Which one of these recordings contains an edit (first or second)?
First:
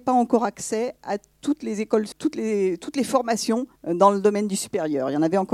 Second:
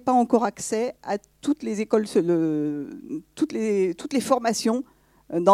first